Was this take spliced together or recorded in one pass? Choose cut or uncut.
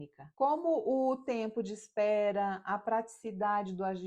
uncut